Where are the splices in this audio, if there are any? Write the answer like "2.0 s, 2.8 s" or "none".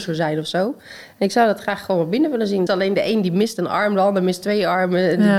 2.7 s